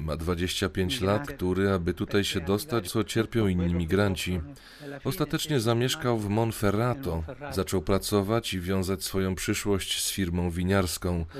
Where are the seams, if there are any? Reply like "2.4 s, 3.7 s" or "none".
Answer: 1.2 s, 2.8 s